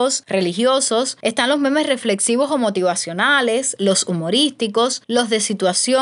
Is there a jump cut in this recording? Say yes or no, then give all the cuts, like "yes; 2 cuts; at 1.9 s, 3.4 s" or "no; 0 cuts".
no; 0 cuts